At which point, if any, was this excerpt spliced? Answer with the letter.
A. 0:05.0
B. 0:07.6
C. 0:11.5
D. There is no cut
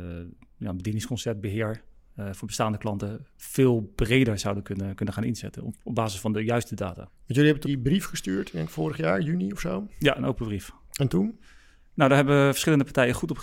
B